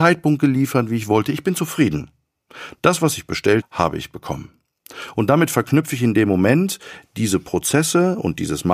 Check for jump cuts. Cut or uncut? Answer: cut